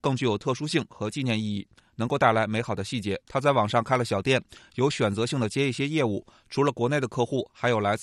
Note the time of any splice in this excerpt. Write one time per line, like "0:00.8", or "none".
0:03.2